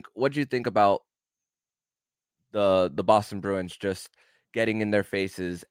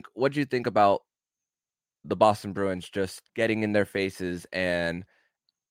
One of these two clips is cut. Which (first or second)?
second